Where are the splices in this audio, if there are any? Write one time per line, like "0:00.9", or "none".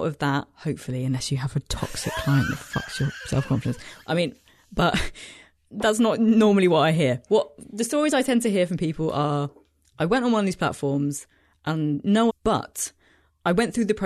0:12.3